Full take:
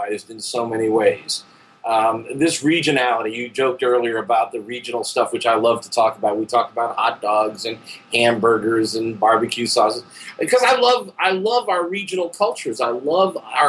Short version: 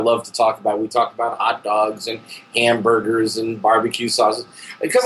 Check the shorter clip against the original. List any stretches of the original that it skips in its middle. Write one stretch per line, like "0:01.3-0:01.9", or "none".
none

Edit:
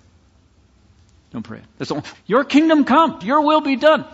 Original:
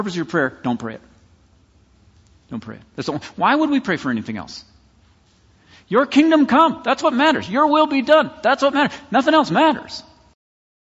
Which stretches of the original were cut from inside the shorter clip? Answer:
0:03.3-0:05.8
0:06.8-0:07.5

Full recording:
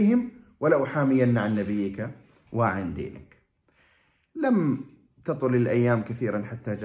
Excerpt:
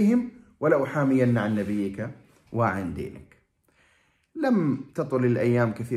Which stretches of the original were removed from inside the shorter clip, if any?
0:04.9-0:05.2

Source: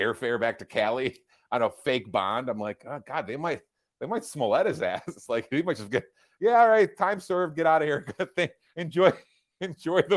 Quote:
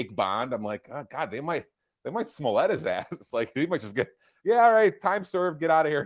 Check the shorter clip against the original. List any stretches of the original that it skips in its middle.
none

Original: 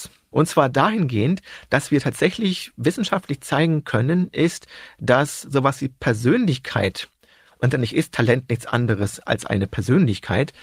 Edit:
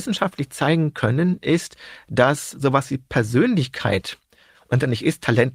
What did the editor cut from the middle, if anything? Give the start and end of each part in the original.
none

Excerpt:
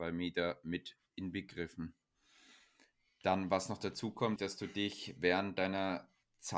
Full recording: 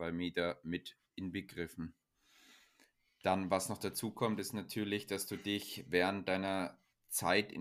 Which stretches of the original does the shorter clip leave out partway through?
0:04.4-0:05.1

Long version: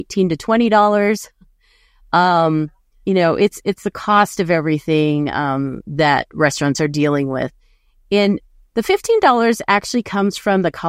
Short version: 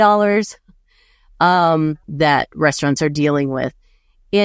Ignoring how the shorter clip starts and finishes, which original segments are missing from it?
0:02.8-0:05.8

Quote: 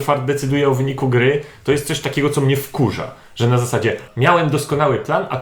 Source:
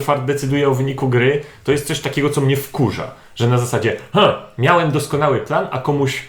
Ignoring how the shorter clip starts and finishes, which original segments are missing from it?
0:04.1-0:04.5

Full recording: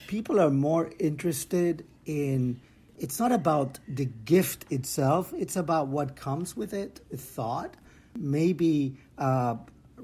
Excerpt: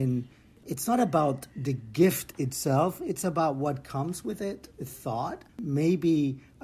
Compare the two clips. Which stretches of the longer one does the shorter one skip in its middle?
0:07.8-0:08.1

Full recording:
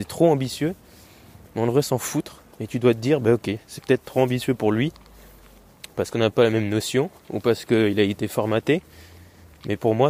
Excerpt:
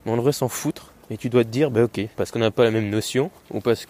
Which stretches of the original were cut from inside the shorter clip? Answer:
0:03.6-0:05.9

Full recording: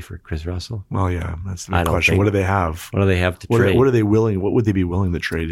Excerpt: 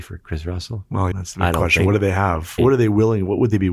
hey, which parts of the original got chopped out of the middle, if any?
0:01.1-0:01.4
0:02.9-0:03.7

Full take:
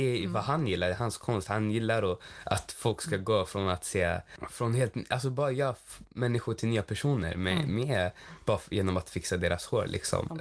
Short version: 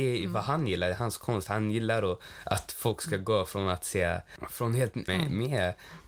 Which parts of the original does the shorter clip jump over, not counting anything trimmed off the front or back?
0:05.1-0:07.5

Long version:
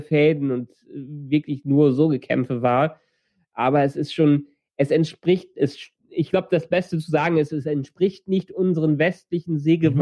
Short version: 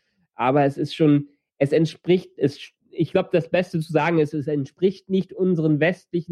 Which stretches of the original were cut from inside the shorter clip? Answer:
none

